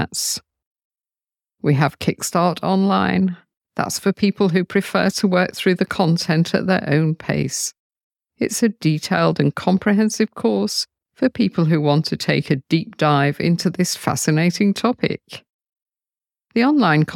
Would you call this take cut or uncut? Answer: uncut